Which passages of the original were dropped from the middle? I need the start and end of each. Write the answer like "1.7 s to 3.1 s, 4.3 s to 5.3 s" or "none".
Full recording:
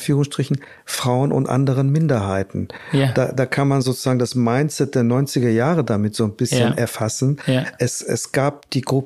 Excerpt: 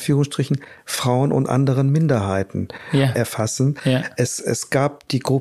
3.1 s to 6.8 s